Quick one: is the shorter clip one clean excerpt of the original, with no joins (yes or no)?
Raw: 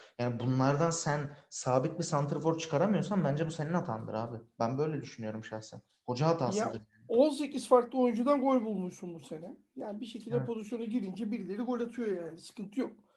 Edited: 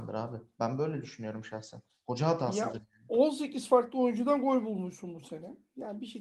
yes